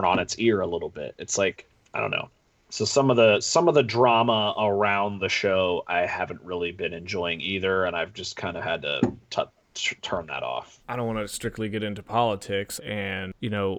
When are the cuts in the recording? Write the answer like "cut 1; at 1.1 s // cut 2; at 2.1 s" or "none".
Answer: cut 1; at 10.8 s // cut 2; at 12.8 s